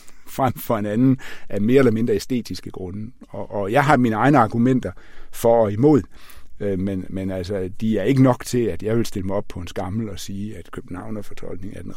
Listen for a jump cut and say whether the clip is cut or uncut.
uncut